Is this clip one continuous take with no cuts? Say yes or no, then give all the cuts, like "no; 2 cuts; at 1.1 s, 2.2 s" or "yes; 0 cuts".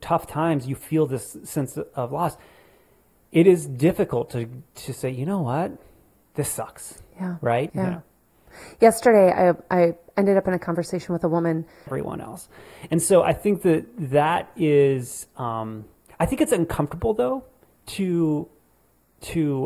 no; 2 cuts; at 7.7 s, 11.9 s